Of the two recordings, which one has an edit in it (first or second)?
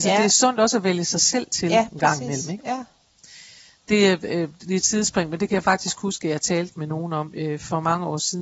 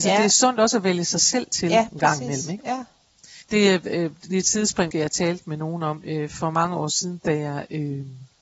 second